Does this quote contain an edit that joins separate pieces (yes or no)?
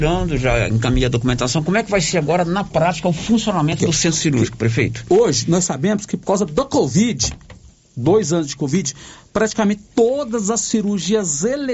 no